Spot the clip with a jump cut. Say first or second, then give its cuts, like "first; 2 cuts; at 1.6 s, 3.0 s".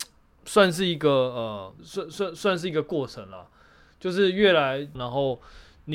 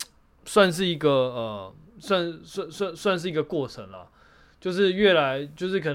first; 2 cuts; at 1.8 s, 4.9 s